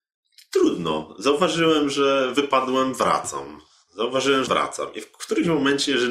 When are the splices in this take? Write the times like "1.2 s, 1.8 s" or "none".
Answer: 4.5 s